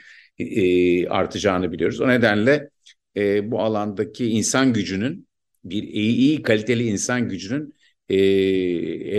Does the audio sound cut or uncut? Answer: uncut